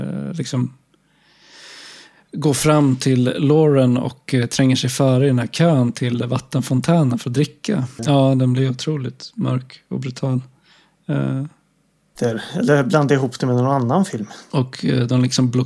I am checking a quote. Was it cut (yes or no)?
yes